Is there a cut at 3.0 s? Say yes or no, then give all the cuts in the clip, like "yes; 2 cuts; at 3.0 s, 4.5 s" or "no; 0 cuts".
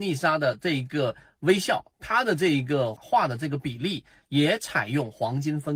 yes; 1 cut; at 3.0 s